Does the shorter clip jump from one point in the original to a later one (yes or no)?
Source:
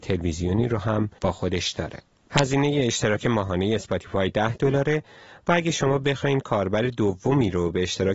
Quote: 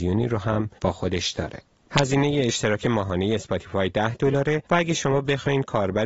yes